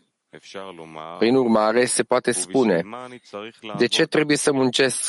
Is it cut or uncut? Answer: uncut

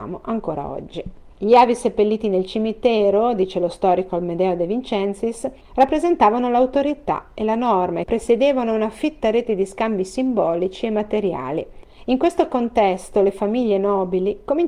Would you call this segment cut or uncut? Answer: cut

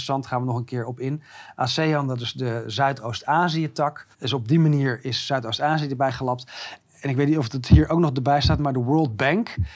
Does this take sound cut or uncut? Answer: cut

